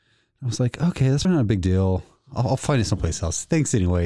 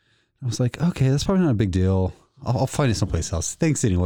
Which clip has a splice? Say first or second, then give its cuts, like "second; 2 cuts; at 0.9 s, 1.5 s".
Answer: first; 1 cut; at 1.2 s